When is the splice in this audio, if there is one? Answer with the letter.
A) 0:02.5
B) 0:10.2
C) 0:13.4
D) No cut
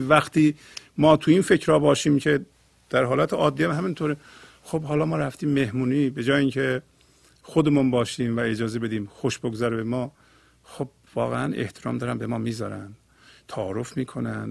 D